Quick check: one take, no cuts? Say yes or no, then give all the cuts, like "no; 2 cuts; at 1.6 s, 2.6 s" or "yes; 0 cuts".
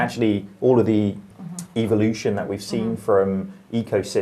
no; 1 cut; at 1.3 s